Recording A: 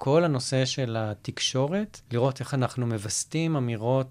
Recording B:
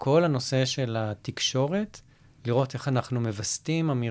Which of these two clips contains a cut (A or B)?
A